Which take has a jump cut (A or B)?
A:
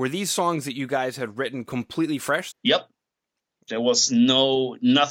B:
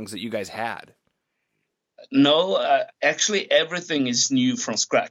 A